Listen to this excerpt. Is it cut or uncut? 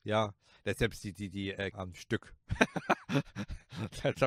cut